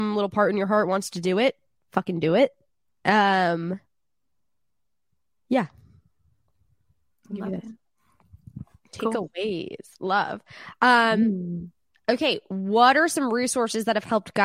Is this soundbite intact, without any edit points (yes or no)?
no